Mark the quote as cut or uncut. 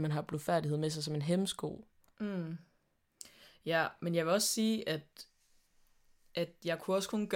uncut